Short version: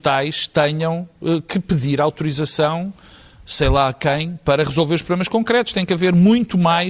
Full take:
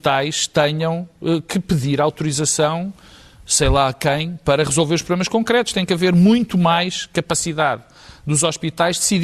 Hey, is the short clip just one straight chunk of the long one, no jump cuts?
yes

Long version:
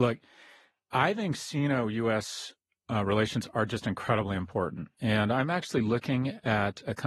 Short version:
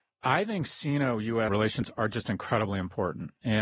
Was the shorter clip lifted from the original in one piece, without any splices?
no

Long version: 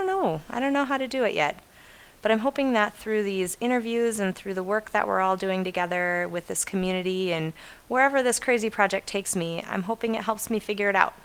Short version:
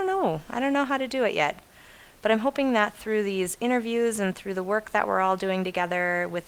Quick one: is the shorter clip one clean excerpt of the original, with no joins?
yes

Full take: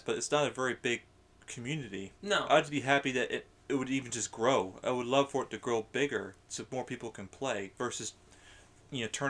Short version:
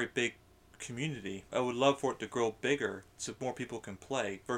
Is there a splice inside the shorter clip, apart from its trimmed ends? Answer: yes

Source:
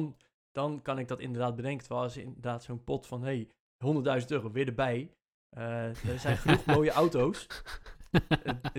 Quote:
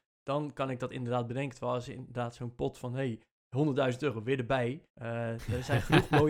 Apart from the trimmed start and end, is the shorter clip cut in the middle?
yes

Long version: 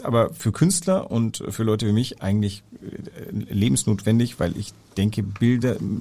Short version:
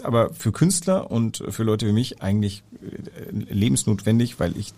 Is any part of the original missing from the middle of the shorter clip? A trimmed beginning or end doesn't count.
no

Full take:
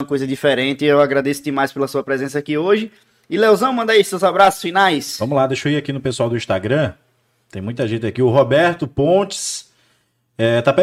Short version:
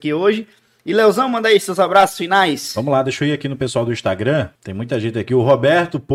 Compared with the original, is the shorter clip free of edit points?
no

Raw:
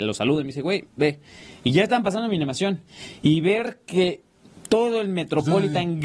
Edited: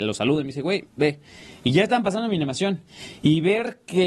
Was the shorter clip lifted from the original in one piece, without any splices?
yes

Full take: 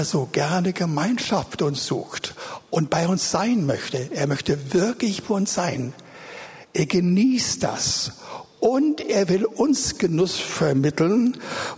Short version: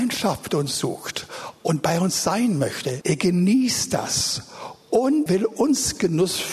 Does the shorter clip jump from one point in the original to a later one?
yes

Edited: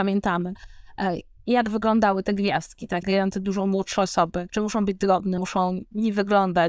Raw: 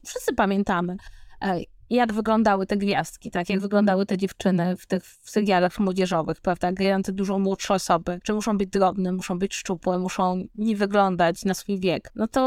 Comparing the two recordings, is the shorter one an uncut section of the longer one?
no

